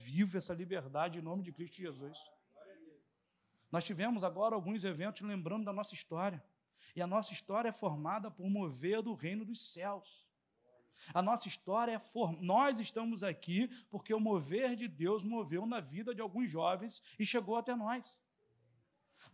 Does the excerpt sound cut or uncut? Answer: uncut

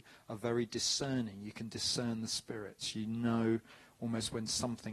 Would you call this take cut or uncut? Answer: uncut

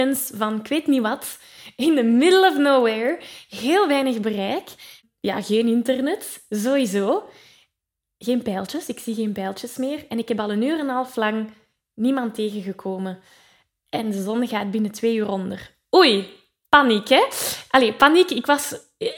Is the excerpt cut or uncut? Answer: uncut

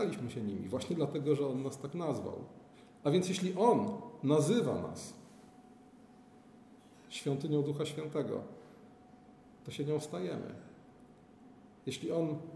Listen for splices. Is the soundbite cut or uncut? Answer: uncut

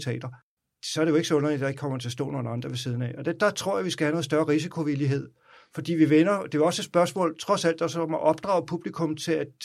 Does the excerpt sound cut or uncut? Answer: uncut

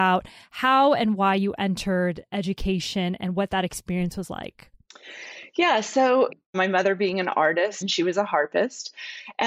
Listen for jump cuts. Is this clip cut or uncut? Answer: cut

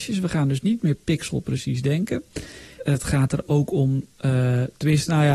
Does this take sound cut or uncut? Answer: cut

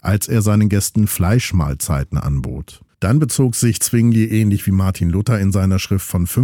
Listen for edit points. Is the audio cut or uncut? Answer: cut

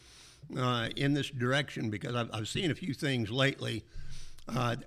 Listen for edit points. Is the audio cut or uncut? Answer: uncut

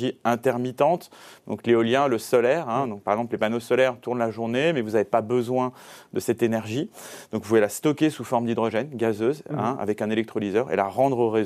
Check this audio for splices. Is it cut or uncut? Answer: uncut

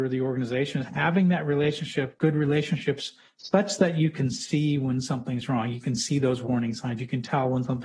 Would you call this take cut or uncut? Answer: uncut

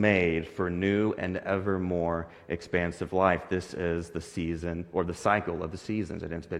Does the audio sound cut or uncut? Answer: uncut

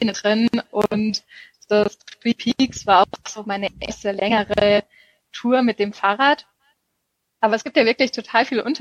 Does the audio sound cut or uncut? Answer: uncut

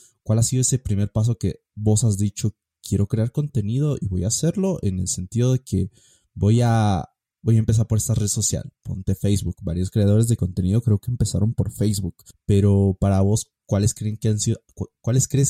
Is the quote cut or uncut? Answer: cut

